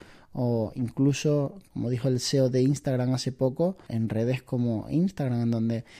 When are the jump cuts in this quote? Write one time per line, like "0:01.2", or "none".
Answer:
0:03.9